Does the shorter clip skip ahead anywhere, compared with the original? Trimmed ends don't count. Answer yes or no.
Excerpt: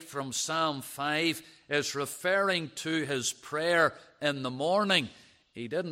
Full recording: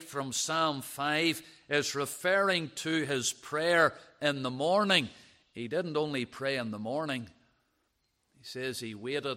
no